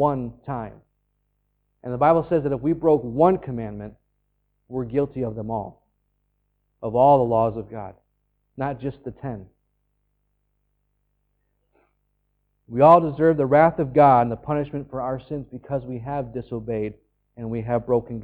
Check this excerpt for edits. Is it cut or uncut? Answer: uncut